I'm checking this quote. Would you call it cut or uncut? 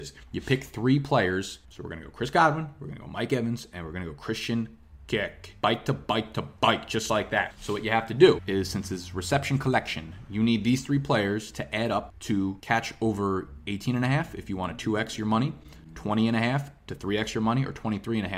uncut